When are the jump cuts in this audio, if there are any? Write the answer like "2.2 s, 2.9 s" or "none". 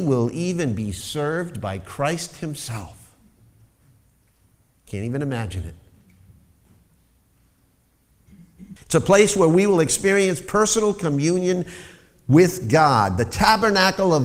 8.8 s

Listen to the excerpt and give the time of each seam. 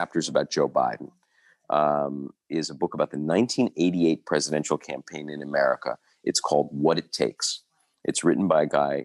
none

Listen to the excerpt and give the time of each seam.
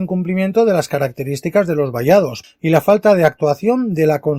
2.4 s

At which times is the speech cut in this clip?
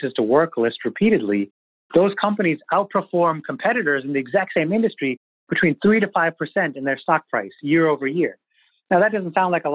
none

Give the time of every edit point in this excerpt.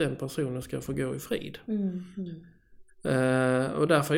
2.9 s

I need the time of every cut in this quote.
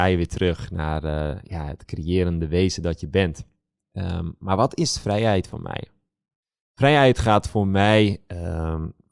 3.8 s

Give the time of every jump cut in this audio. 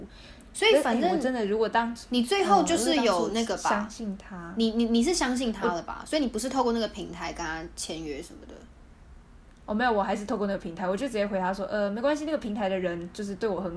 none

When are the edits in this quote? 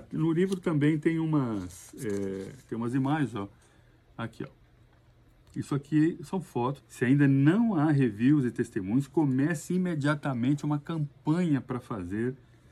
6.8 s

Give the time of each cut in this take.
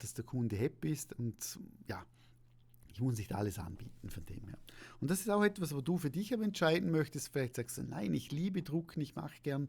none

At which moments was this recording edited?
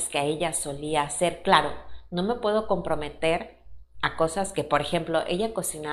none

